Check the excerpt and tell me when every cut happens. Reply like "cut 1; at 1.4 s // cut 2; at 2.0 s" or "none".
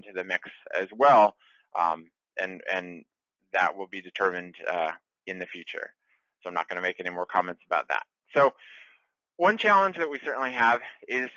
none